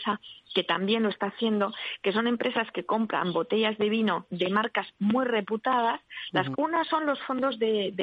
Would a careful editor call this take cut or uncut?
cut